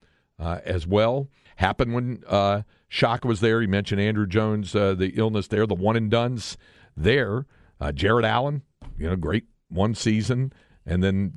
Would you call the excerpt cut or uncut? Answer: cut